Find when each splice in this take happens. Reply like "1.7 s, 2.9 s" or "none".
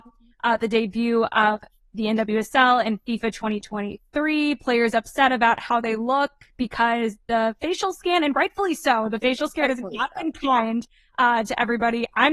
none

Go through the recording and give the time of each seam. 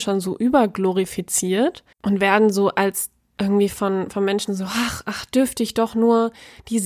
1.9 s, 4.5 s

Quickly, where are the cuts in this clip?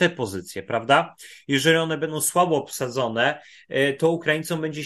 none

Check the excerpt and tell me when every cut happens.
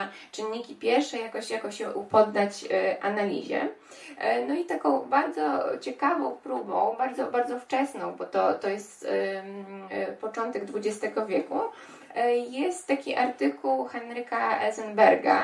none

